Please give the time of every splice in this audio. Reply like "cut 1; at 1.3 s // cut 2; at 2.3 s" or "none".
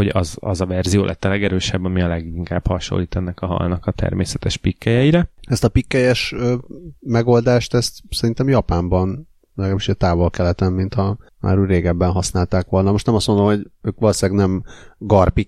none